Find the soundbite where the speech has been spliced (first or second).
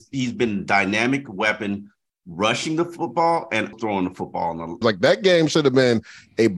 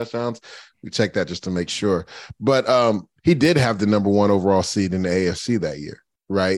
first